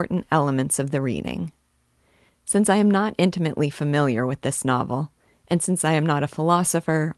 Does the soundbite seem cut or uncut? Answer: cut